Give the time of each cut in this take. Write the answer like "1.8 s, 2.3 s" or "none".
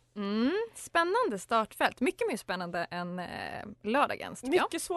none